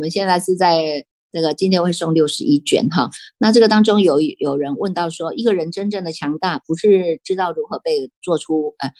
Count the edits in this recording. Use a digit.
0